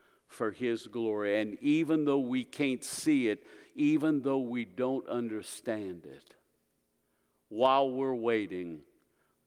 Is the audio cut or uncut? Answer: uncut